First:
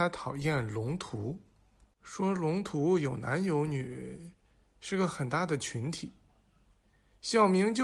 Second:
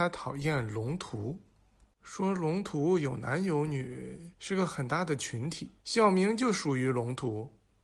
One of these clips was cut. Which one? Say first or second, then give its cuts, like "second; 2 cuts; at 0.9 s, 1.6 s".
second; 2 cuts; at 4.4 s, 5.8 s